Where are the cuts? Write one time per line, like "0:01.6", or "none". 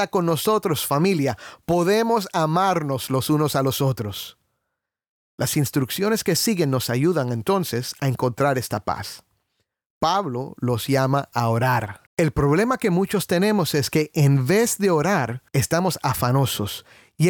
0:12.1
0:15.5